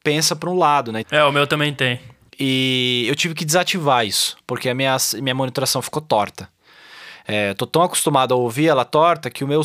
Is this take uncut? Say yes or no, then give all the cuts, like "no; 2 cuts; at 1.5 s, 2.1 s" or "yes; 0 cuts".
no; 1 cut; at 1.0 s